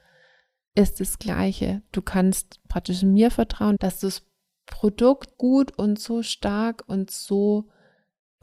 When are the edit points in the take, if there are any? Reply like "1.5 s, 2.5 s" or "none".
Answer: 3.8 s, 5.3 s